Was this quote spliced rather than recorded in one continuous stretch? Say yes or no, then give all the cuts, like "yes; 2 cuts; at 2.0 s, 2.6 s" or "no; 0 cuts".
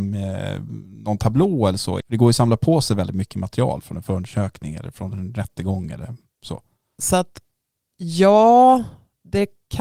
yes; 2 cuts; at 2.0 s, 7.0 s